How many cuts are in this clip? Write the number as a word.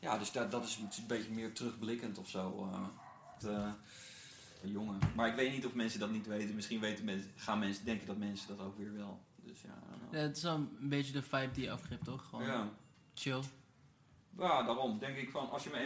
two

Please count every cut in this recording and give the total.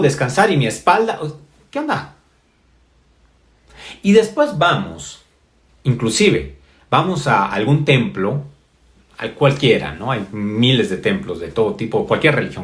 one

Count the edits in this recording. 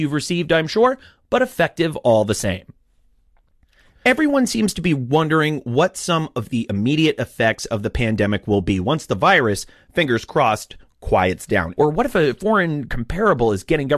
one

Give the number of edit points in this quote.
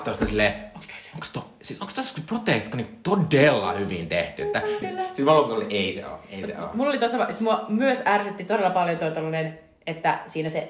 one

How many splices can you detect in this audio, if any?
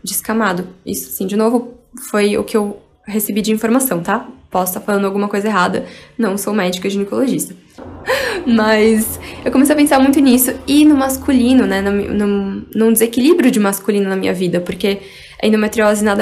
one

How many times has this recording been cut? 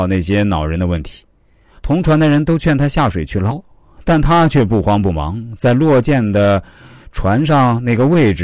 two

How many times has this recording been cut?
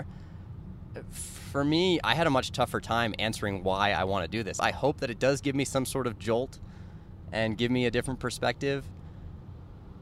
one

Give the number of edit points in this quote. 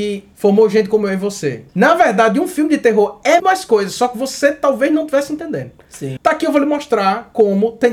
three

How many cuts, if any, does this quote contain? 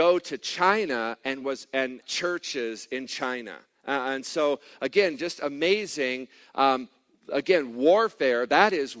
one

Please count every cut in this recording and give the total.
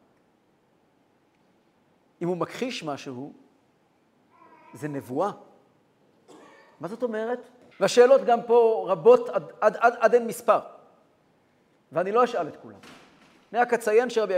one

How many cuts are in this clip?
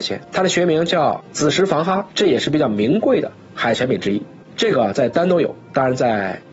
one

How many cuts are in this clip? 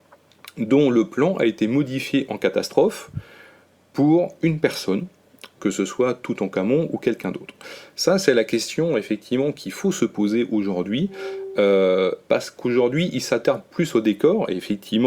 two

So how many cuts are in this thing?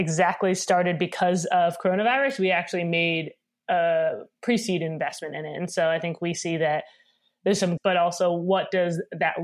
one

